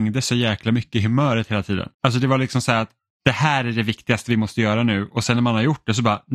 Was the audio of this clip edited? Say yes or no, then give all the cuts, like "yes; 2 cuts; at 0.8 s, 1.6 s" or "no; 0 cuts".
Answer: yes; 1 cut; at 1.9 s